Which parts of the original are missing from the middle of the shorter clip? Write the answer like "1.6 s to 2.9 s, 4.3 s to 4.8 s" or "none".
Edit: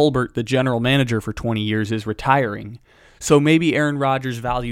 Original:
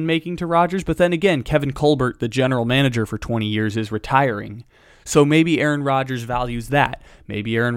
none